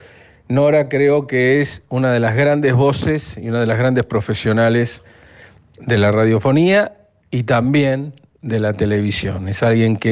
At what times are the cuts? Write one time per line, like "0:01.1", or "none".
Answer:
none